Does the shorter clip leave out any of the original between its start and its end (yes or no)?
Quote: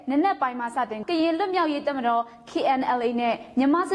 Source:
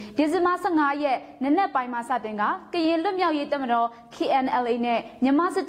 yes